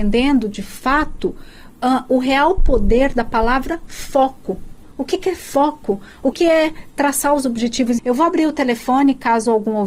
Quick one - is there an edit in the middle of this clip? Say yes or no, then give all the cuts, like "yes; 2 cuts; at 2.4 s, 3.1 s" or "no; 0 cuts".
yes; 2 cuts; at 6.3 s, 8.0 s